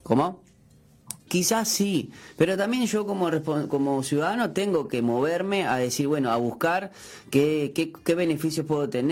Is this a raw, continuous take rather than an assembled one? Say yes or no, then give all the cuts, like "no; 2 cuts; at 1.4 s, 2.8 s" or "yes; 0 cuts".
no; 1 cut; at 1.3 s